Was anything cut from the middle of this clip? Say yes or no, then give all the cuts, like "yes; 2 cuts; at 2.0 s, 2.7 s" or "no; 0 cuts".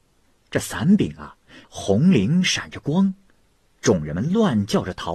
yes; 1 cut; at 1.6 s